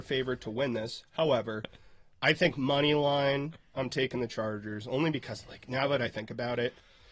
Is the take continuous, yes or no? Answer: yes